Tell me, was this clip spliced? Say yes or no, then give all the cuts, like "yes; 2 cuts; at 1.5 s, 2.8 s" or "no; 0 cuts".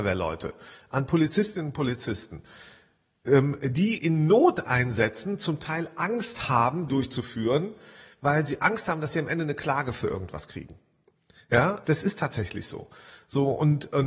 yes; 2 cuts; at 6.9 s, 11.8 s